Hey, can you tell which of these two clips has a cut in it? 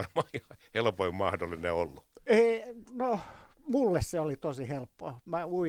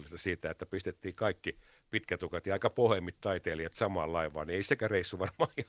first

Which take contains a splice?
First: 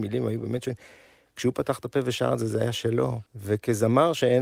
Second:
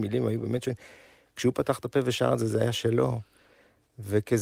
first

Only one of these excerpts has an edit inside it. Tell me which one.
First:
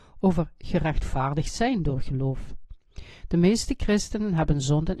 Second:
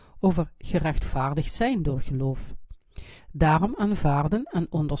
second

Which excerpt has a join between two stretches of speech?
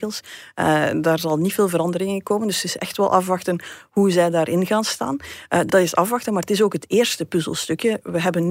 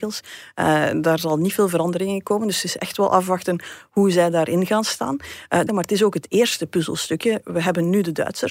second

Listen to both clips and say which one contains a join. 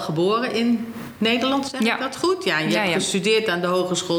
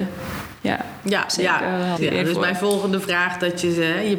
second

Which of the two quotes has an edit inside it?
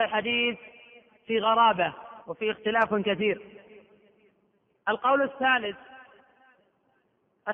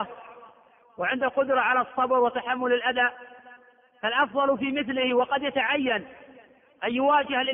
first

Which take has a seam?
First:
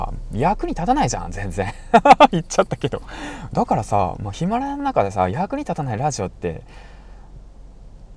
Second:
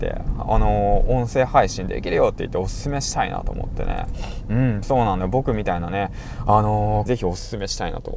second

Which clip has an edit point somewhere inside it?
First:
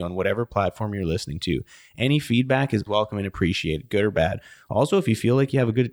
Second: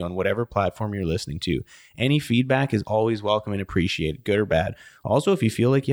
first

